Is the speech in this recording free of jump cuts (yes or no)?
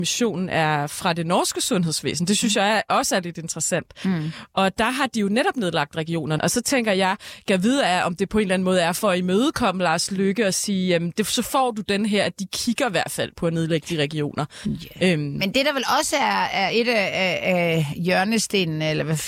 no